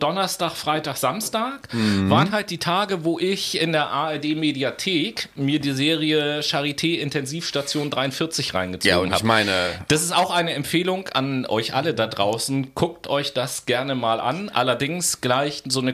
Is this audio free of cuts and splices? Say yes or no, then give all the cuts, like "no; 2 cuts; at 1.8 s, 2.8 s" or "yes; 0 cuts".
yes; 0 cuts